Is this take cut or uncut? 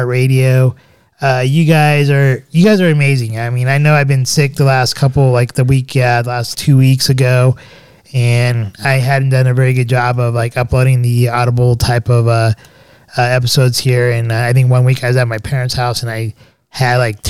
cut